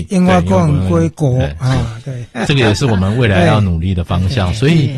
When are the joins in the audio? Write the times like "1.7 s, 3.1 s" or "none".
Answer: none